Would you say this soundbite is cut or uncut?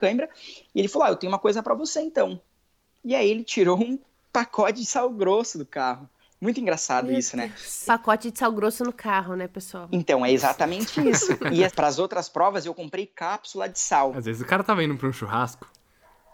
cut